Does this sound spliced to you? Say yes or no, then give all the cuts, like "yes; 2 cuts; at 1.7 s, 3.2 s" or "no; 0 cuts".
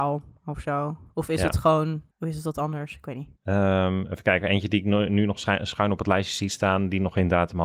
no; 0 cuts